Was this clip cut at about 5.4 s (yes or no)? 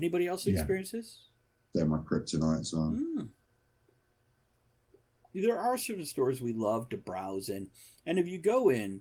no